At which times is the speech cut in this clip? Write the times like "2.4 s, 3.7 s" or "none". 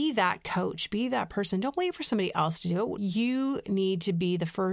3.0 s